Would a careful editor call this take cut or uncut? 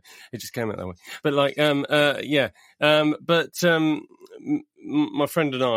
uncut